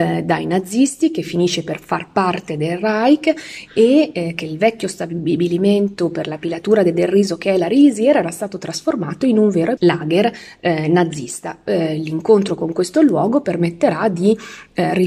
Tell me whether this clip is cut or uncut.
cut